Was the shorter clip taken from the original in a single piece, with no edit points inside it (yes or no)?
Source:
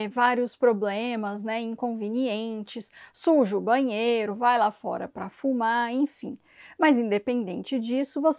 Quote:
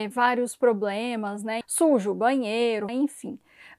no